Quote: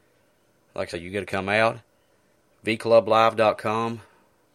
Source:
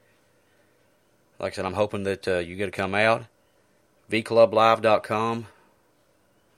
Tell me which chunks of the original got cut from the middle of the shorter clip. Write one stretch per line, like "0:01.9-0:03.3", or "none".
0:01.6-0:02.4